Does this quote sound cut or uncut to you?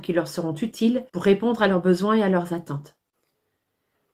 cut